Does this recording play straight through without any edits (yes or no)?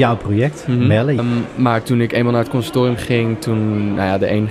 no